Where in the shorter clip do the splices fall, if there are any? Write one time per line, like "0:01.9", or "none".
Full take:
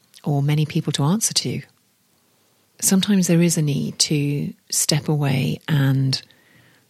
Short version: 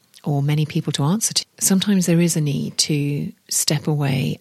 0:01.4